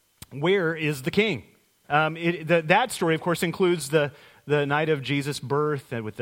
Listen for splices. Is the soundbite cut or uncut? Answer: cut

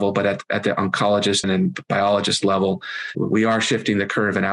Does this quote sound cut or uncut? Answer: cut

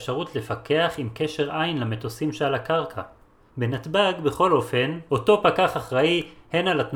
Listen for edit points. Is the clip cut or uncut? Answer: cut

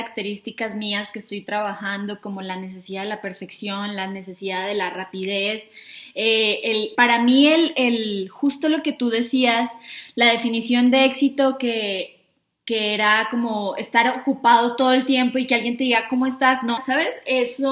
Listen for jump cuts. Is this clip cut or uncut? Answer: cut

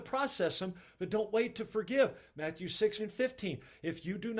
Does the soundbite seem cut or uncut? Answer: cut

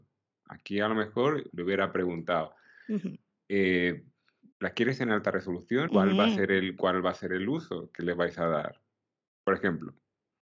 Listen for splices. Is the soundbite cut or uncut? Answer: cut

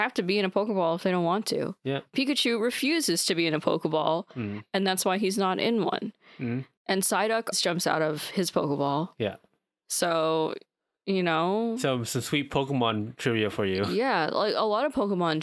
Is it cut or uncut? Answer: cut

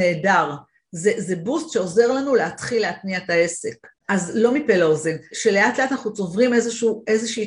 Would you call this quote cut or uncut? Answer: cut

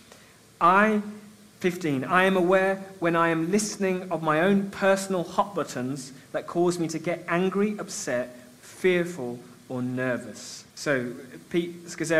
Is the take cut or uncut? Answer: cut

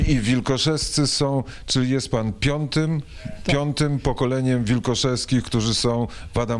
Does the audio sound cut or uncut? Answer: uncut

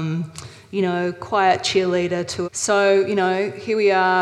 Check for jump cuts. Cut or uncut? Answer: cut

